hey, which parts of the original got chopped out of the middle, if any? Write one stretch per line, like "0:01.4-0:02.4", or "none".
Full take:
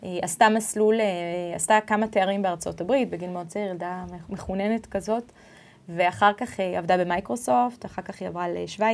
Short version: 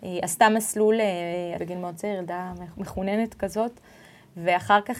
0:01.6-0:03.1